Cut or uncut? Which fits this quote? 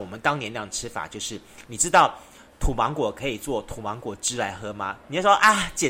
uncut